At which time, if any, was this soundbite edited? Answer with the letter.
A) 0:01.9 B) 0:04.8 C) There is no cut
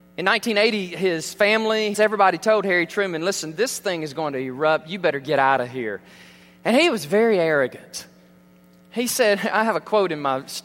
A